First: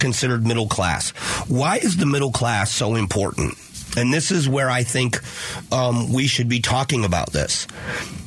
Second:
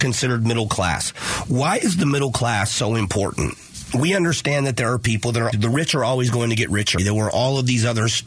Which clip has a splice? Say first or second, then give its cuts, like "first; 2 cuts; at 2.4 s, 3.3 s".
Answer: second; 3 cuts; at 3.9 s, 5.5 s, 7.0 s